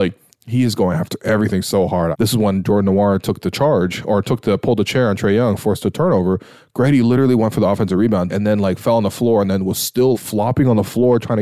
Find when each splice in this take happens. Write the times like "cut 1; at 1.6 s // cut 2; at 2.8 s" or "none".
cut 1; at 2.1 s // cut 2; at 8.3 s // cut 3; at 10.1 s